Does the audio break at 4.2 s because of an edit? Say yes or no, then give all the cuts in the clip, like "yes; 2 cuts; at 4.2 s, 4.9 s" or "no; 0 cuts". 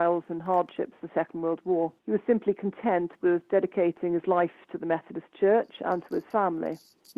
no; 1 cut; at 2.0 s